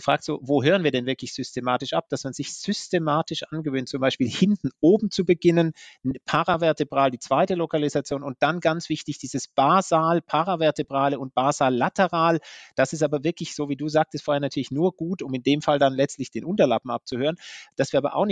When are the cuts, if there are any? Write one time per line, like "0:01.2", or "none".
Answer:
none